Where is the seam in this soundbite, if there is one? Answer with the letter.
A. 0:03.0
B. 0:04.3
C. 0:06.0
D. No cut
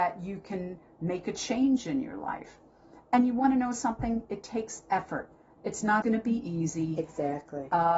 C